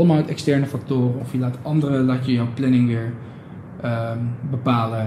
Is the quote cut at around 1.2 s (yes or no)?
yes